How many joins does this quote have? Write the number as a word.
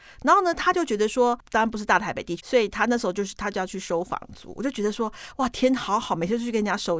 one